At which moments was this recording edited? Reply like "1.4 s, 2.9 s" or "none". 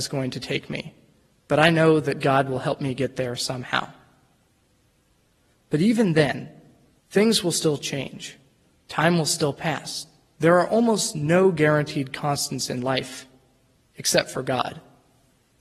7.0 s, 10.3 s